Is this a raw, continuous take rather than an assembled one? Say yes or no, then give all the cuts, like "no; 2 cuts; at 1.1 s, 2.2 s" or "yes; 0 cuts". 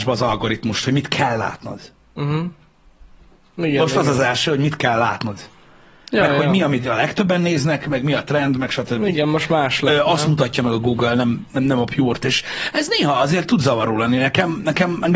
yes; 0 cuts